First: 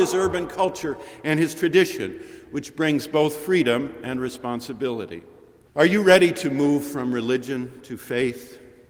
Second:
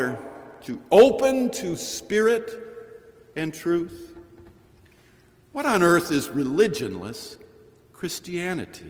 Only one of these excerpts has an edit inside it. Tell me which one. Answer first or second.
first